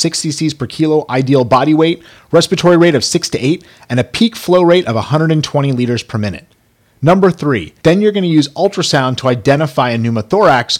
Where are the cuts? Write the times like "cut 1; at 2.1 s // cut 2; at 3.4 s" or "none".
cut 1; at 7.8 s